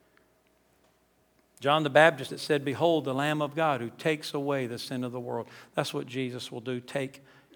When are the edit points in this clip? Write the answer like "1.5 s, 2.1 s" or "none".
2.3 s